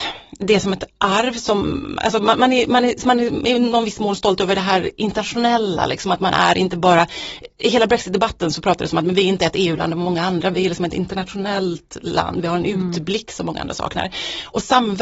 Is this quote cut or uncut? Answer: uncut